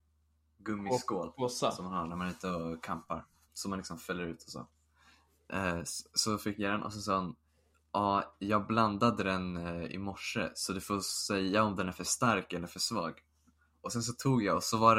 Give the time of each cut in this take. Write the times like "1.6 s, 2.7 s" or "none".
3.5 s